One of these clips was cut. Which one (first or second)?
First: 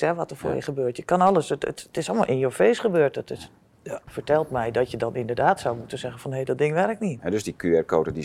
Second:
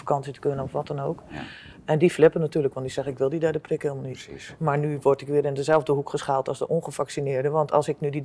first